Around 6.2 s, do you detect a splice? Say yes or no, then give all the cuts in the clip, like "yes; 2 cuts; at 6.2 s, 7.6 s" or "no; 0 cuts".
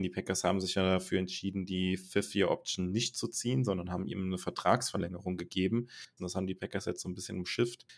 yes; 1 cut; at 6.2 s